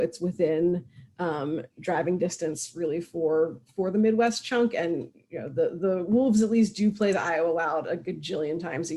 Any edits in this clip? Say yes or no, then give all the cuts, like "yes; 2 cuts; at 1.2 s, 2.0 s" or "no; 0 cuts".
no; 0 cuts